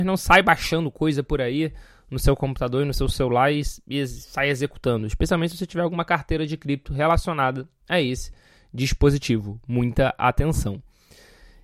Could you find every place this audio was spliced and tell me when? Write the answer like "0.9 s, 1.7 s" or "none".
none